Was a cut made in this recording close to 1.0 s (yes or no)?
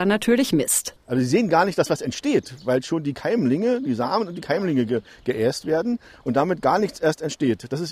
yes